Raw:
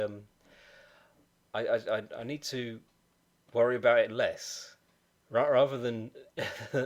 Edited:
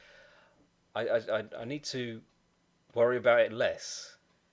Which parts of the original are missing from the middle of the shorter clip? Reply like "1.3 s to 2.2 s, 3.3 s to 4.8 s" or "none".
none